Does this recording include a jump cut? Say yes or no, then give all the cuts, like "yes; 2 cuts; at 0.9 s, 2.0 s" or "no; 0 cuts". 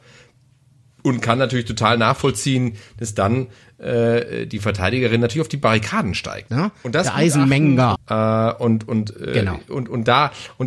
yes; 2 cuts; at 6.5 s, 7.9 s